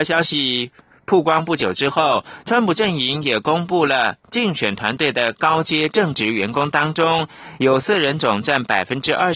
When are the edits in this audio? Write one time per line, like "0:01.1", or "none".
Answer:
none